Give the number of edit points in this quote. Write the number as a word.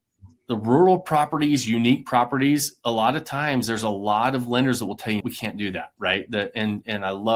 one